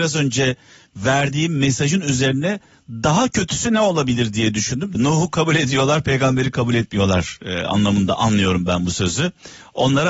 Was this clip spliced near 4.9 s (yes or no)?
yes